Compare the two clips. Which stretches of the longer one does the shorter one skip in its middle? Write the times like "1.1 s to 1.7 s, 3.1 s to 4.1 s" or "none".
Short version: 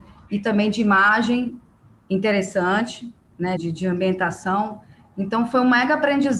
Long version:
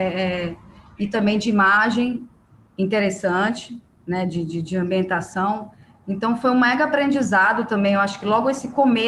4.2 s to 4.5 s